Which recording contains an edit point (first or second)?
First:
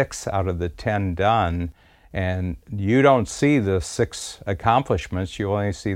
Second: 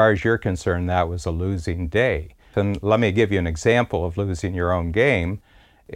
second